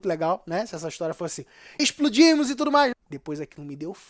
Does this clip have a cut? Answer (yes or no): yes